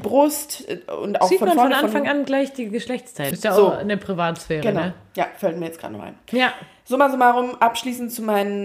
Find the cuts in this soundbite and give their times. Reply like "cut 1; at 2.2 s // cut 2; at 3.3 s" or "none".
cut 1; at 3.3 s